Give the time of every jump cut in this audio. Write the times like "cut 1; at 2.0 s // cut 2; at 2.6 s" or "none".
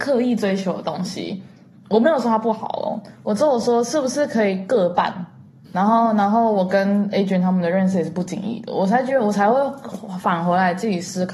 cut 1; at 5.7 s